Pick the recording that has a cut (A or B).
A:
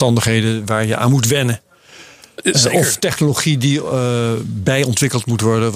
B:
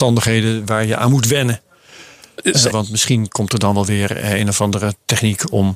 B